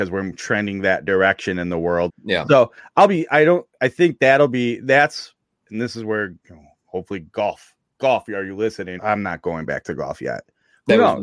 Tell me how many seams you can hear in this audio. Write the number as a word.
two